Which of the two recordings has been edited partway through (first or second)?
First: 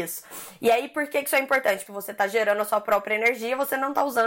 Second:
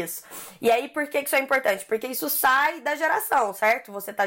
first